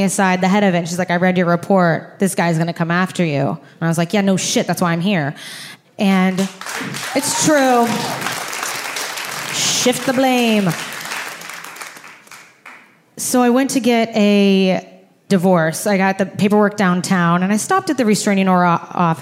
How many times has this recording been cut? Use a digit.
1